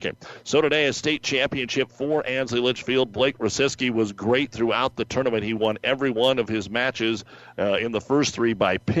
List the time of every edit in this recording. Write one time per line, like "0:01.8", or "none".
none